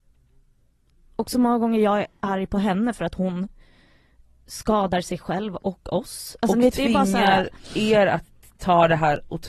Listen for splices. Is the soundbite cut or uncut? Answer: uncut